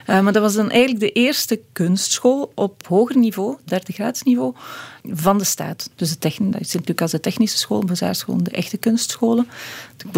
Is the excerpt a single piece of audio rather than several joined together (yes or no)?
no